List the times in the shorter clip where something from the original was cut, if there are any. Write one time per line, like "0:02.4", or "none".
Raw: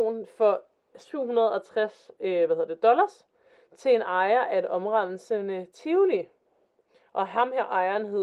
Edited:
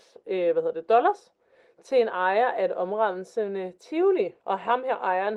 0:04.4